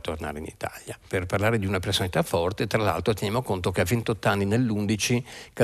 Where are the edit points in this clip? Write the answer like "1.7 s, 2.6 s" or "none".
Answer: 1.1 s